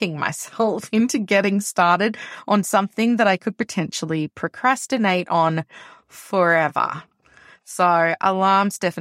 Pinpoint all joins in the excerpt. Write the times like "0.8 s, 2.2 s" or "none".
none